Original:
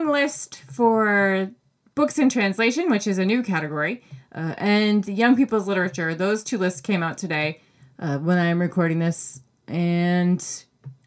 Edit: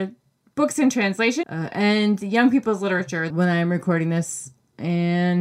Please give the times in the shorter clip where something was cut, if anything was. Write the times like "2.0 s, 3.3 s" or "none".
1.4 s, 3.3 s